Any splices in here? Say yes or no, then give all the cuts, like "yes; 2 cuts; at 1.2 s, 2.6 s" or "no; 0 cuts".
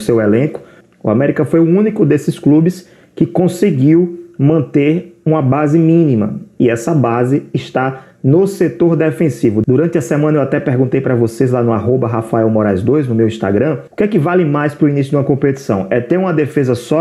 yes; 1 cut; at 13.9 s